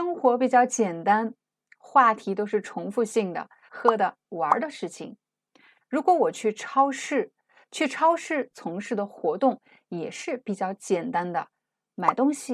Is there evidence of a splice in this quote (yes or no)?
yes